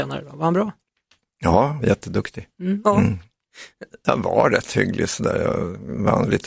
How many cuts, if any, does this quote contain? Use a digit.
3